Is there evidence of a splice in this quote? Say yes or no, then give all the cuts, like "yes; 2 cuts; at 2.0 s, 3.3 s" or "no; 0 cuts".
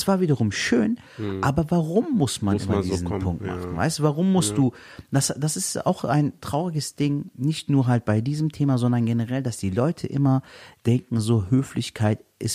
no; 0 cuts